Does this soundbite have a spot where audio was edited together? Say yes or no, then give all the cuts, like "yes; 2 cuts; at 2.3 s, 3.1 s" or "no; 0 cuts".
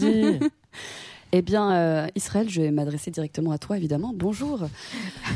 no; 0 cuts